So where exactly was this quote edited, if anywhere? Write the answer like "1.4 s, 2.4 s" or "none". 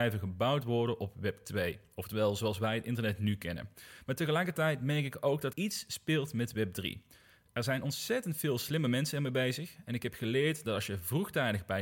5.5 s